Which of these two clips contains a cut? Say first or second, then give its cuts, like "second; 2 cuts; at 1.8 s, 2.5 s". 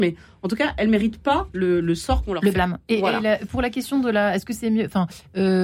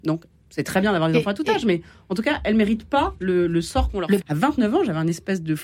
second; 1 cut; at 4.2 s